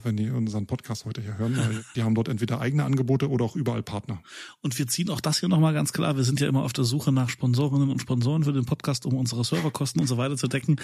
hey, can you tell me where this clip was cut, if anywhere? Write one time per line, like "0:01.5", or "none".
0:01.9

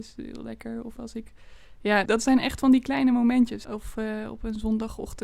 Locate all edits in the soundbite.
0:02.1
0:03.6

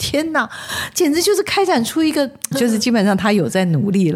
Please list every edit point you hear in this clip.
0:02.5

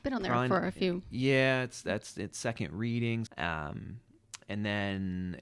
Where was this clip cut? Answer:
0:03.3

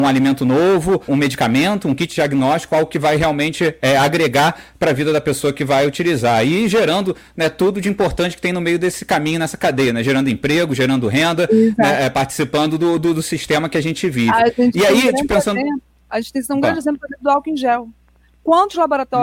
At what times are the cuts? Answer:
0:01.1

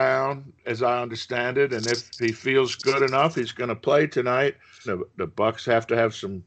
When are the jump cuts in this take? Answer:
0:04.9

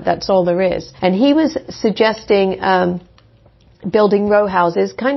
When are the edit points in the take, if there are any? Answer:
0:01.0

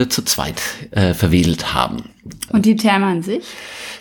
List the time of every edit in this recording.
0:02.5

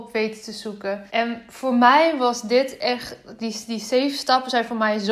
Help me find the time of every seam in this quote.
0:01.1

